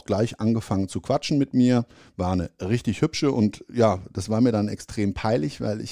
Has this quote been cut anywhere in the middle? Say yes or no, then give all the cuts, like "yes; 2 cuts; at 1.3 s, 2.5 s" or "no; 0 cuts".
no; 0 cuts